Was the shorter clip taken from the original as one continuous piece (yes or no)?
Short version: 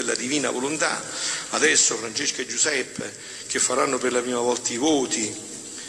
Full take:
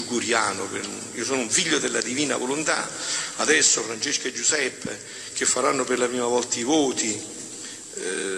yes